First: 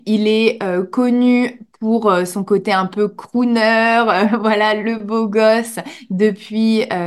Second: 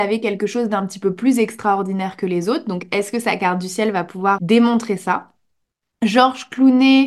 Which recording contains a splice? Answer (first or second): second